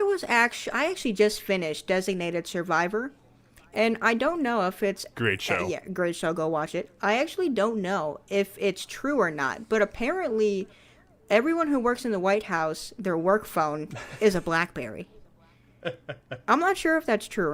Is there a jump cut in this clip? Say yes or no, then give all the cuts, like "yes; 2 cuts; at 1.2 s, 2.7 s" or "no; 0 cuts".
no; 0 cuts